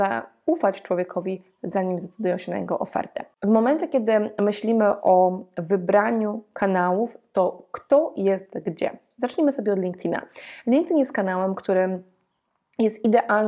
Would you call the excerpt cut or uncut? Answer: uncut